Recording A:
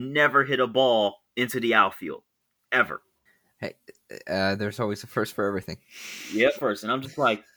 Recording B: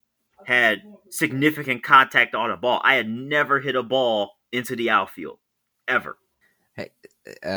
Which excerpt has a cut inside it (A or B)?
A